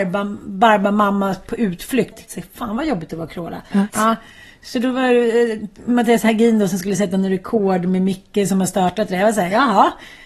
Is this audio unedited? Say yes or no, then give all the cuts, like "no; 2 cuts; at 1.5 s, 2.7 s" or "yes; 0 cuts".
no; 2 cuts; at 2.1 s, 3.9 s